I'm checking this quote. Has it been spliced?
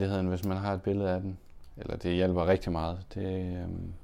no; 0 cuts

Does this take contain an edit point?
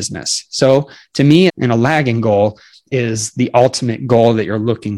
yes; 1 cut; at 1.5 s

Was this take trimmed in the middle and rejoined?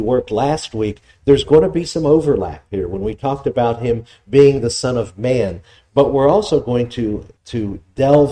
yes; 1 cut; at 7.4 s

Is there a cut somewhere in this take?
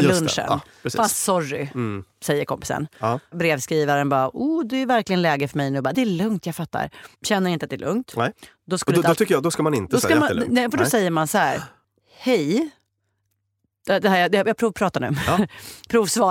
yes; 1 cut; at 5.9 s

